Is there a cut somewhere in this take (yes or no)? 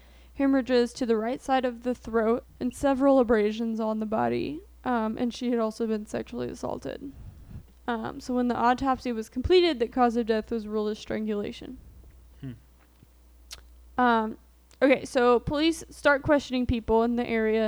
yes